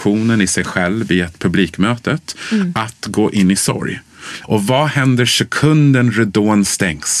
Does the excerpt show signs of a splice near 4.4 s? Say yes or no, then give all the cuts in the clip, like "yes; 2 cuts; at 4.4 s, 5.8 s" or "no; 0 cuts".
yes; 1 cut; at 4.4 s